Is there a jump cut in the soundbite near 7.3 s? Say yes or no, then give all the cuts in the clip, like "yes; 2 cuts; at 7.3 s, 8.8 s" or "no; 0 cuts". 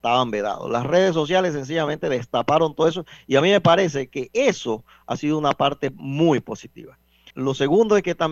yes; 1 cut; at 7.3 s